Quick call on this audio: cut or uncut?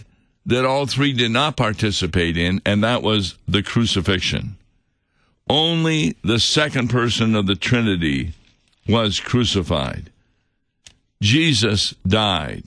uncut